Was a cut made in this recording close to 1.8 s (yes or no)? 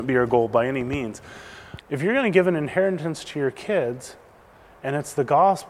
yes